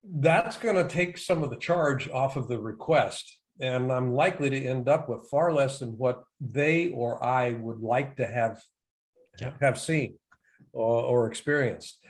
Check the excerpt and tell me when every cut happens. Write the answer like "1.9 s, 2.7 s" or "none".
none